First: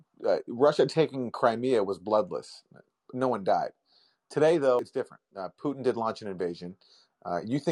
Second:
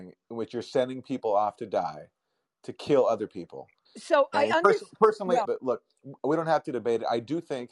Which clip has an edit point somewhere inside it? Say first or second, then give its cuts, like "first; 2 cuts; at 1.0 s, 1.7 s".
second; 2 cuts; at 3.9 s, 5.4 s